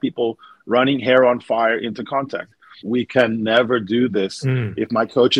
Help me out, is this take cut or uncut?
cut